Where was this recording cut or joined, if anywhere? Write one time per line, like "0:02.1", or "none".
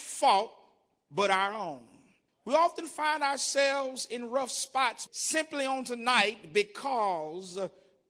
0:02.3
0:05.1